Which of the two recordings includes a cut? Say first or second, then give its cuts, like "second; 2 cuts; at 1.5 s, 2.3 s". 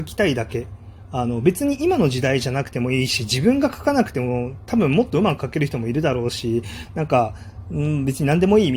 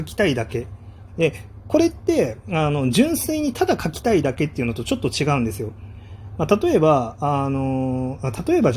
second; 1 cut; at 1.1 s